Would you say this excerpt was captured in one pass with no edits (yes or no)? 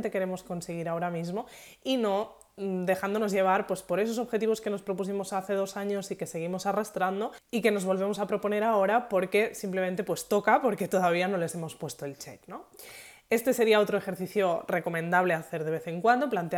yes